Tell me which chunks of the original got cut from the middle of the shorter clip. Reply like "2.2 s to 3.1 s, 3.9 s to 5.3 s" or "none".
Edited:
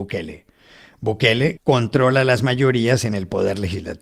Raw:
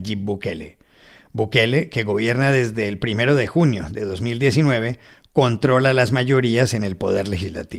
1.9 s to 5.3 s